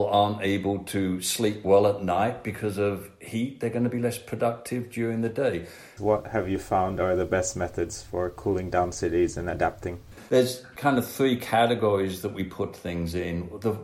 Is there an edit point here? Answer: no; 0 cuts

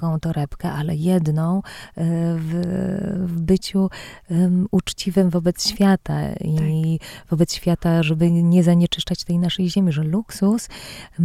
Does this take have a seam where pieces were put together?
no; 0 cuts

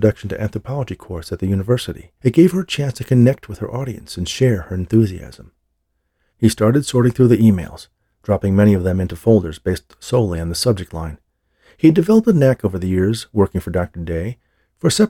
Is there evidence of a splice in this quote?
yes; 2 cuts; at 2.2 s, 6.3 s

